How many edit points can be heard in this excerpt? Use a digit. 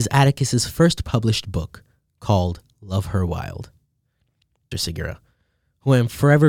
1